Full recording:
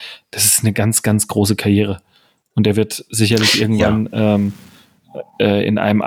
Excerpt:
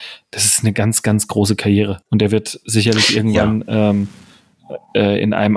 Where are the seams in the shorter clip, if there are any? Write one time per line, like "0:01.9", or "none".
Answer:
0:02.0